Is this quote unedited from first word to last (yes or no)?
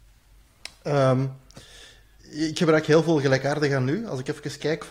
yes